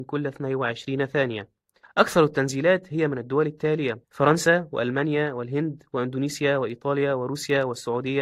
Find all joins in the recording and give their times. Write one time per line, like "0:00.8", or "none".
0:01.8
0:04.0